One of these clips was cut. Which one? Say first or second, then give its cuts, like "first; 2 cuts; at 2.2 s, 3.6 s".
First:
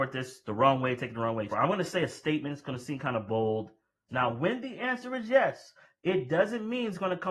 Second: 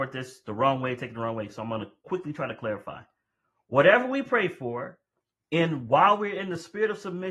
first; 2 cuts; at 1.5 s, 4.1 s